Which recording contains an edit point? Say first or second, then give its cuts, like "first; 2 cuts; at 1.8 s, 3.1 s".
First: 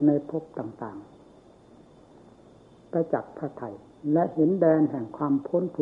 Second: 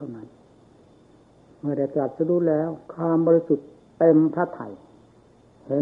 second; 1 cut; at 2.8 s